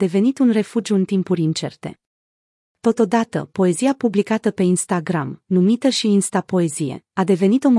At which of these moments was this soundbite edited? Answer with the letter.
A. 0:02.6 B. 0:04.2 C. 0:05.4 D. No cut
D